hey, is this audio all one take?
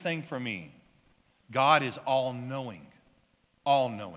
no; 1 cut; at 1.4 s

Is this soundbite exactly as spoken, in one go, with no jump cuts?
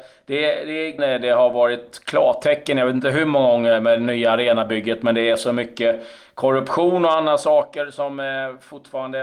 no; 1 cut; at 1.0 s

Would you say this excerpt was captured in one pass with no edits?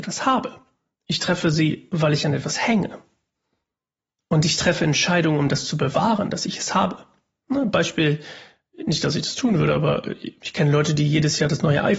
yes; 0 cuts

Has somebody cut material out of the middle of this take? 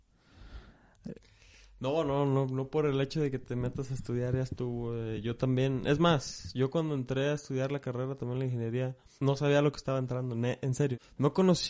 no; 0 cuts

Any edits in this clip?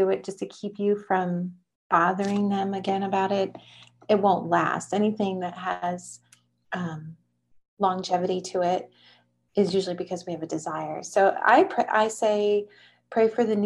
no; 0 cuts

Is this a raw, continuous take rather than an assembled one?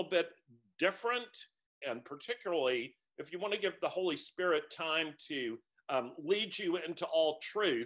no; 1 cut; at 1.8 s

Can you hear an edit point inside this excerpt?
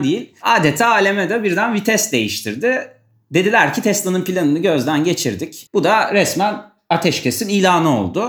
yes; 1 cut; at 5.7 s

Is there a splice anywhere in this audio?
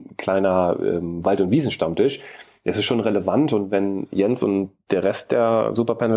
no; 0 cuts

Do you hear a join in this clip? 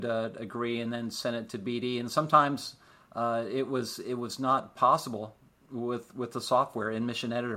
no; 0 cuts

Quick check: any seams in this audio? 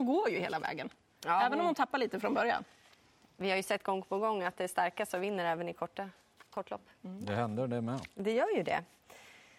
no; 0 cuts

